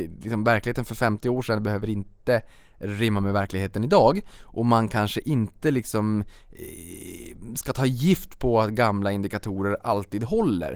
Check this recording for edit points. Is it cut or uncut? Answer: uncut